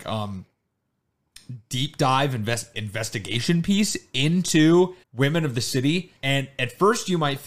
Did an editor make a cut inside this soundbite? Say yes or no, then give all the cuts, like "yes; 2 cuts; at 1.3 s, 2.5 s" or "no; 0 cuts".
yes; 3 cuts; at 2.7 s, 5.0 s, 6.2 s